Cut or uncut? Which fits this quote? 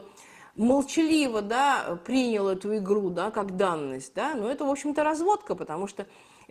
uncut